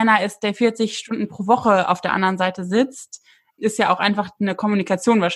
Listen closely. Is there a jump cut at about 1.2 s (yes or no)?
no